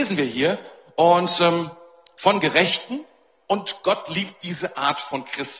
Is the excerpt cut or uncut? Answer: uncut